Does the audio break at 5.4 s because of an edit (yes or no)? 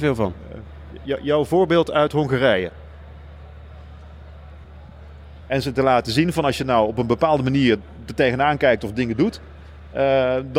yes